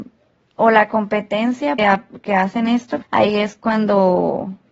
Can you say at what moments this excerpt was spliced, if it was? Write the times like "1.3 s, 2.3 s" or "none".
1.8 s, 3.0 s